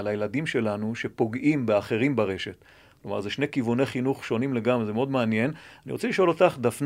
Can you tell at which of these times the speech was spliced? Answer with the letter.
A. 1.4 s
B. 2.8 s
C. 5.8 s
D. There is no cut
D